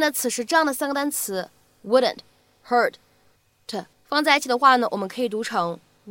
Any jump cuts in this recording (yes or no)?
yes